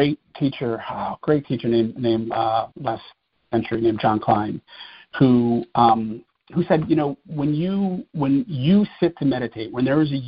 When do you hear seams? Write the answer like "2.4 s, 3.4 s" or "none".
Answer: 2.7 s